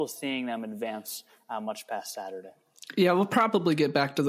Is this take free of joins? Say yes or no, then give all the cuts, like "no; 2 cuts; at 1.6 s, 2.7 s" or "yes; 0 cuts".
yes; 0 cuts